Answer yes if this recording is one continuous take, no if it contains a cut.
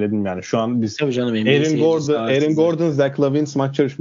yes